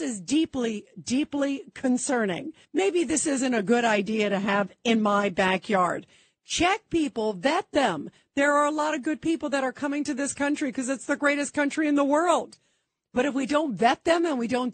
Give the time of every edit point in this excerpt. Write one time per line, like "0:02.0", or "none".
0:02.6